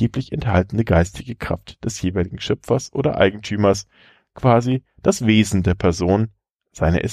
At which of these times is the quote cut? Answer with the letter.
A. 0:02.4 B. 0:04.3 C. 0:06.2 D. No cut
D